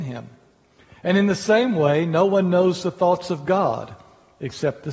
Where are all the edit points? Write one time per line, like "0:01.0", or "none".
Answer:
none